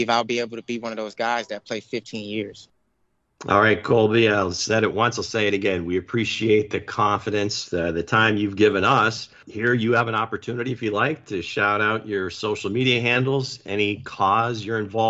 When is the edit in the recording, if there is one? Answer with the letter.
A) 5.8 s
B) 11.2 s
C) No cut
C